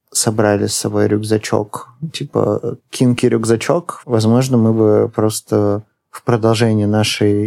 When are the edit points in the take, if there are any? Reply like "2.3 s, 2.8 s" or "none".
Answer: 4.0 s